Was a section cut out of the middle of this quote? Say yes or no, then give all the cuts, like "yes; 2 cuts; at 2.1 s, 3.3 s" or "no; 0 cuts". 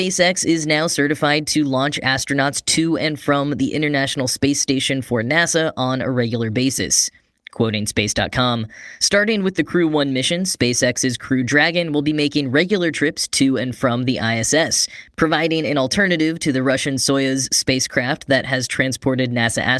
no; 0 cuts